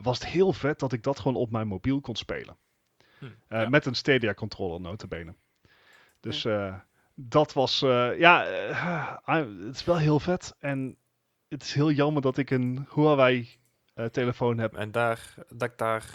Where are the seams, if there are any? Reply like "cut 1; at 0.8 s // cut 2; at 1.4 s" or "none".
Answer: cut 1; at 14.7 s